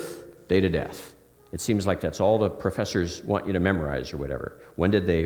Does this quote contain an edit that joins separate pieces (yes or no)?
no